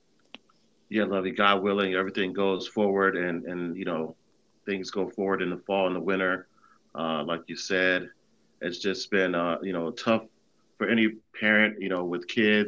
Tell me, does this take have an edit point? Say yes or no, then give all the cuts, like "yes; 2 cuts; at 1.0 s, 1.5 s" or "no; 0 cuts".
yes; 1 cut; at 7.2 s